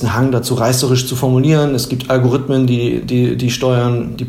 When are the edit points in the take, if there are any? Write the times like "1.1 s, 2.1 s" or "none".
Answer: none